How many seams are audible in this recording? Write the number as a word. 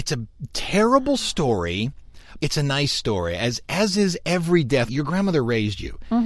two